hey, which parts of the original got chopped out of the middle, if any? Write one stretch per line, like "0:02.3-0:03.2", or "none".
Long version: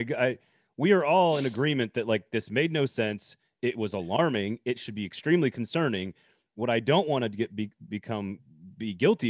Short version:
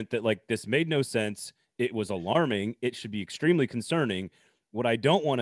none